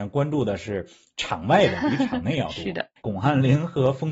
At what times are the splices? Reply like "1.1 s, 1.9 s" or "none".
3.0 s